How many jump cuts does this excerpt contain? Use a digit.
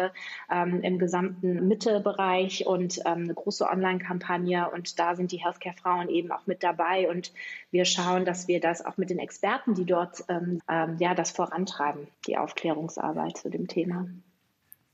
3